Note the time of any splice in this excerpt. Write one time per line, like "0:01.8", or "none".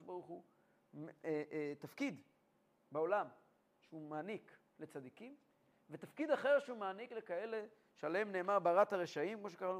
none